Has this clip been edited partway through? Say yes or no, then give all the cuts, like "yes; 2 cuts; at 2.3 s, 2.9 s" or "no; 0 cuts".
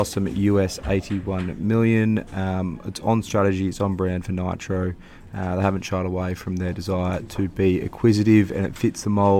no; 0 cuts